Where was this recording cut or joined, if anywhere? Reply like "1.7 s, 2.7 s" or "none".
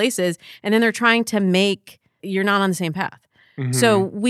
2.2 s